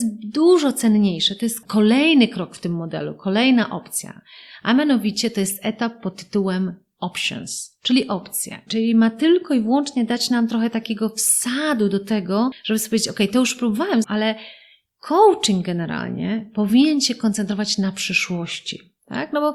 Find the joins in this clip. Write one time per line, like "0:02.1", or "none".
0:08.7
0:14.0